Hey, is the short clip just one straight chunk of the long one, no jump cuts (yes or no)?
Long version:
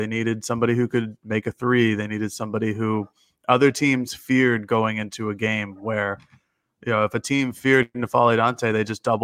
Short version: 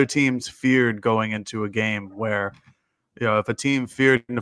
yes